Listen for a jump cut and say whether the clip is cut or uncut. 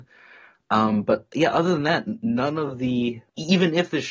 uncut